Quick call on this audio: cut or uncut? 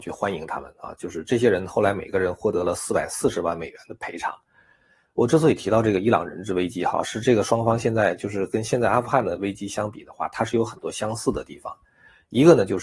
uncut